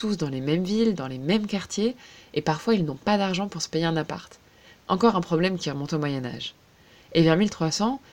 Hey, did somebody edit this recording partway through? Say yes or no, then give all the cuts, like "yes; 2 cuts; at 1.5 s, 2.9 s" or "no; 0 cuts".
no; 0 cuts